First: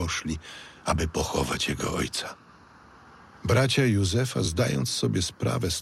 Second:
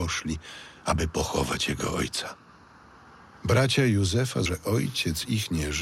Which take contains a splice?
second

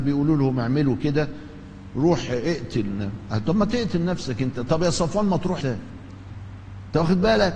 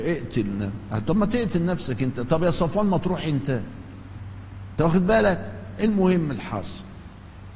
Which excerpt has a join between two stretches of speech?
first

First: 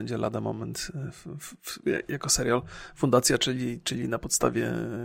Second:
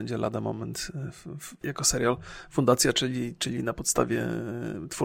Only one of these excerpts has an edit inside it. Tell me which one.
second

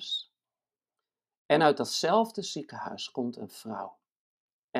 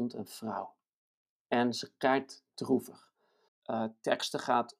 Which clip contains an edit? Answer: second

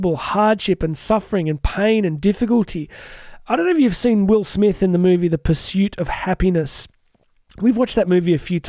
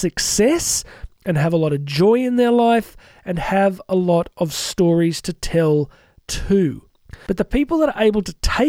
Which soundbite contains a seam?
second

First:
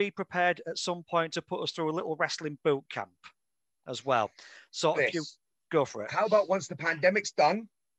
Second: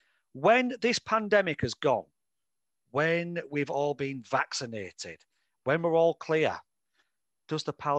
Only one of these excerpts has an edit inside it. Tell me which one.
first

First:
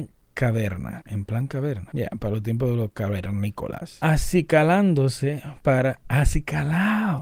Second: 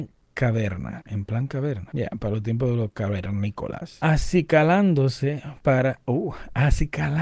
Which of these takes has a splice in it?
first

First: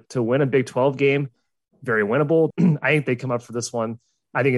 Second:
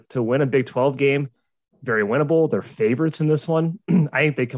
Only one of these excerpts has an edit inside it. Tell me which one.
first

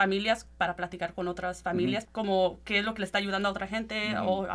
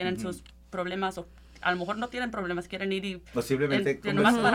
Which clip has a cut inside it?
first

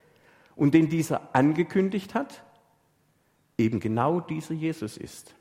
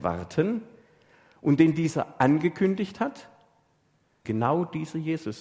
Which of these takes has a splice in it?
second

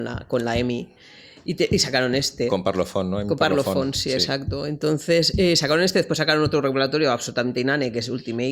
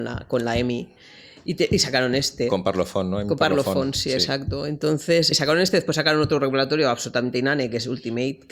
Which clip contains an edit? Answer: second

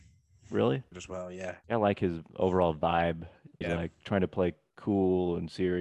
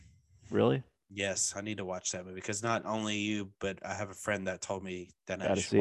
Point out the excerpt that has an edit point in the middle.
first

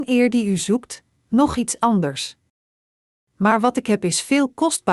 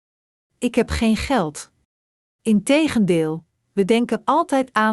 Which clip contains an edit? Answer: second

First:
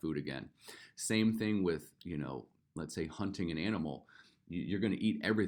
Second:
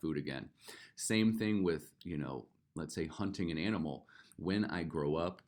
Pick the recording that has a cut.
second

